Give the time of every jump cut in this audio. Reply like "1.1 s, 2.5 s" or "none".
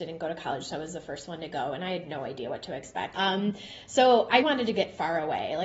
3.1 s, 4.4 s